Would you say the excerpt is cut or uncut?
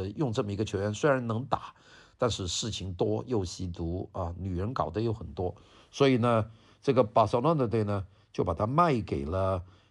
uncut